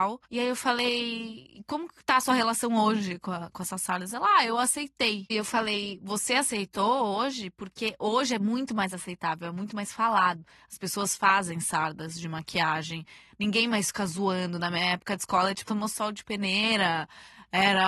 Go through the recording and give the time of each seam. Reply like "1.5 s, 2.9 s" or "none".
5.3 s, 15.6 s